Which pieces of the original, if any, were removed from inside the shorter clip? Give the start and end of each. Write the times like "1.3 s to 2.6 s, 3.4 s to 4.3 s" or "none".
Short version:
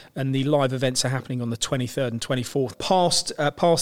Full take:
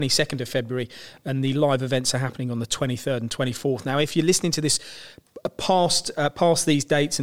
3.8 s to 5.5 s